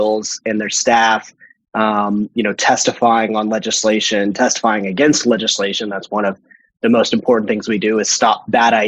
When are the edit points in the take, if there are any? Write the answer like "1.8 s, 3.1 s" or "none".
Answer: none